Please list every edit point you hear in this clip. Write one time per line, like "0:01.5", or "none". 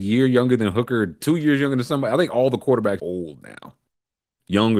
0:01.2
0:03.0